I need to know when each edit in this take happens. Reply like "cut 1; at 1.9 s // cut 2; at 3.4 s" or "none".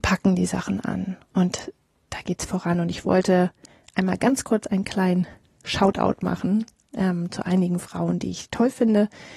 none